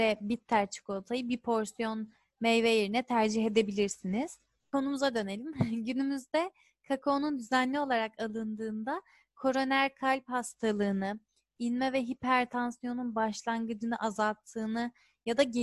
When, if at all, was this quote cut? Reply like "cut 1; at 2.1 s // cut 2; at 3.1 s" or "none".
none